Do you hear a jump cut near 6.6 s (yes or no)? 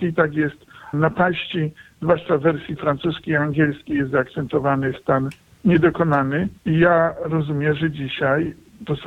yes